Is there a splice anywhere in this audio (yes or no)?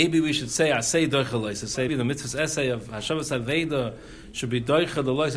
yes